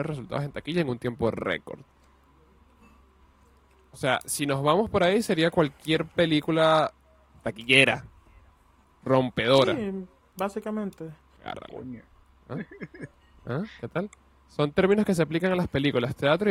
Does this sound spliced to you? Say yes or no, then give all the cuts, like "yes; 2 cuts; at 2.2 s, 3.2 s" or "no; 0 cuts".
yes; 1 cut; at 11.4 s